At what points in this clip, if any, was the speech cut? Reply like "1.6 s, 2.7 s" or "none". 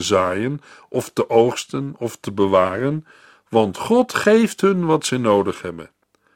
none